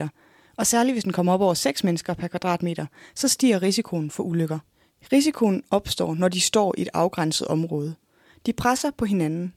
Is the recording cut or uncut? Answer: uncut